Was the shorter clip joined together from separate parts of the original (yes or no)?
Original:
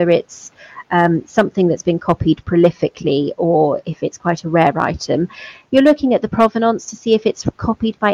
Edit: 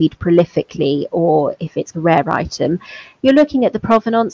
yes